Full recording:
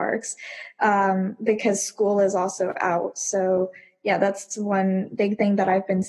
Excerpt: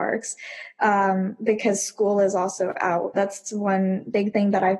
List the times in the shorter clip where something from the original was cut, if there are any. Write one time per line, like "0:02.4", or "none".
0:03.1